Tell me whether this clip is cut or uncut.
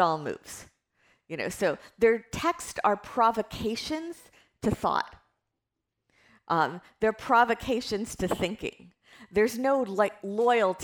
uncut